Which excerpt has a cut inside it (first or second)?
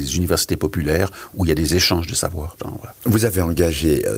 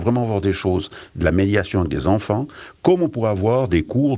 first